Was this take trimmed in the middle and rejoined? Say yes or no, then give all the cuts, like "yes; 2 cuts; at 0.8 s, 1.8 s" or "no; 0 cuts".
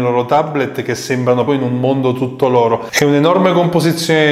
yes; 2 cuts; at 1.5 s, 2.9 s